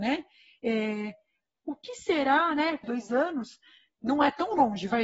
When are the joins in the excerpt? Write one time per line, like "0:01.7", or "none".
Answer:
0:02.8